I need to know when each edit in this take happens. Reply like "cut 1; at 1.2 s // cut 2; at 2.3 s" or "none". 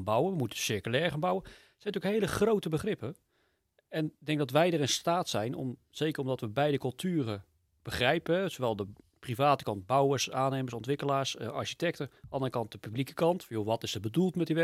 none